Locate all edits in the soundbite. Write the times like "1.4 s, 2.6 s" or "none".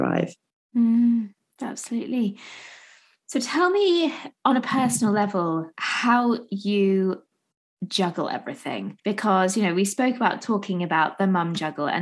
5.7 s, 9.0 s